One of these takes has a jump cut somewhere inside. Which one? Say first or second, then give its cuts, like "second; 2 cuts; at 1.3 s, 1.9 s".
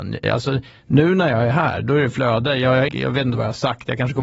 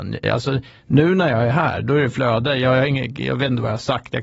first; 1 cut; at 2.9 s